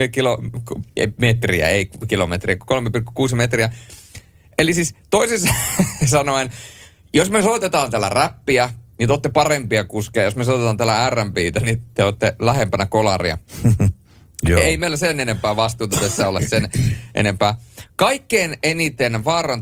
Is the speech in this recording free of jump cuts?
yes; 0 cuts

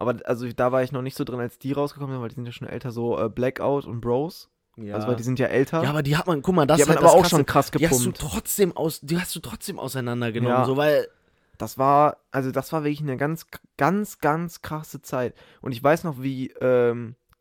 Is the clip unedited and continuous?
yes; 0 cuts

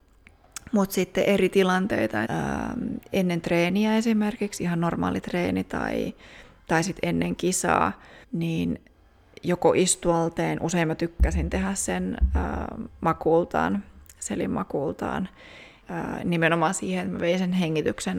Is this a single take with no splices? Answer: no; 3 cuts; at 2.2 s, 8.2 s, 15.8 s

